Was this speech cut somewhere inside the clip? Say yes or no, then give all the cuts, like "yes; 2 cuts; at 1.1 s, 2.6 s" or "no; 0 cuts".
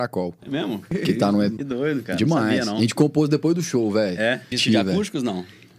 yes; 2 cuts; at 1.6 s, 4.5 s